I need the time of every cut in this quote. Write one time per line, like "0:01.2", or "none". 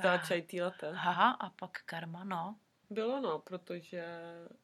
0:01.1
0:02.8